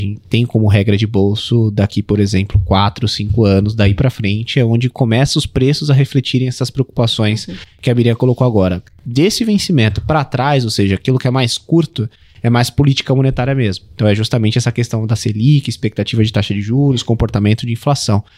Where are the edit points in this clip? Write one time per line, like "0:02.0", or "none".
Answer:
none

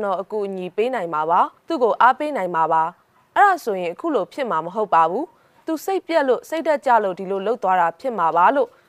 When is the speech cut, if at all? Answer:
0:01.6

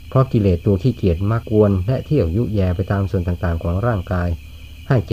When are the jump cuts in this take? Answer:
0:01.4

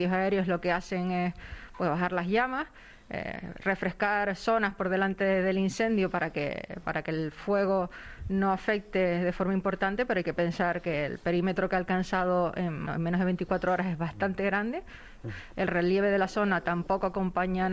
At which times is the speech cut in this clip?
0:12.9
0:15.2

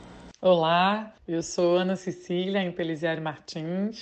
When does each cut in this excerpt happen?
0:01.2

